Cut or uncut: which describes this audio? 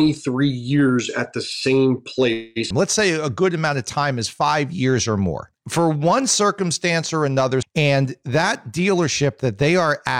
cut